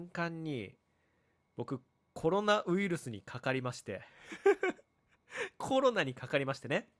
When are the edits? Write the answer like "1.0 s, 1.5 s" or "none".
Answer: none